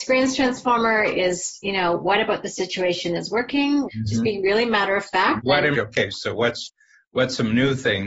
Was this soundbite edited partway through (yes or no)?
yes